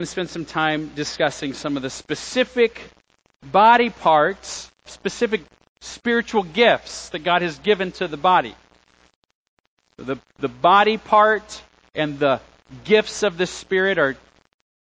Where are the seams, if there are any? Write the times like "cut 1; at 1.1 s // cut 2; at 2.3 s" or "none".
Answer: cut 1; at 4.9 s